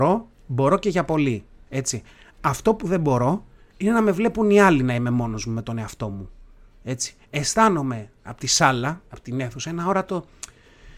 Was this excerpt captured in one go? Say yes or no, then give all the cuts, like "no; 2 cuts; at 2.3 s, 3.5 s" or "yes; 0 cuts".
yes; 0 cuts